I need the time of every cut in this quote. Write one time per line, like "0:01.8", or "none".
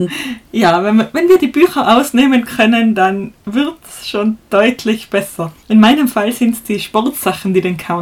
0:05.6